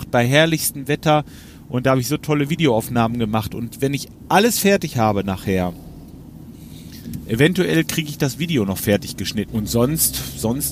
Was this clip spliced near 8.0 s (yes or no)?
no